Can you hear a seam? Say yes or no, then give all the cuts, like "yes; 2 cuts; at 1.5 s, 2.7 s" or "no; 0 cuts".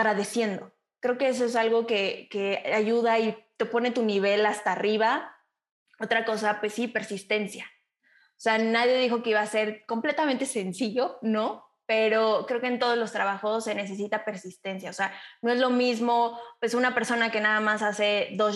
no; 0 cuts